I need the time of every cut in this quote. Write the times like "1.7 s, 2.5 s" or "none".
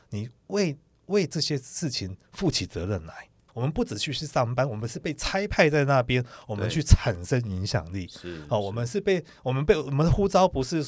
3.5 s